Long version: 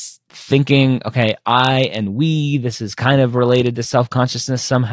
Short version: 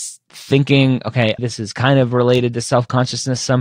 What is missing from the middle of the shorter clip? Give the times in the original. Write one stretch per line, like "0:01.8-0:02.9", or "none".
0:01.4-0:02.6